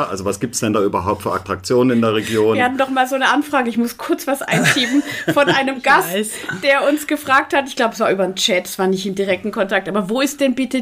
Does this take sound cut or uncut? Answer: uncut